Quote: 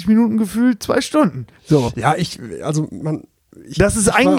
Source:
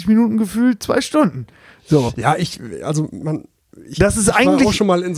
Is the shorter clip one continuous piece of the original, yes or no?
no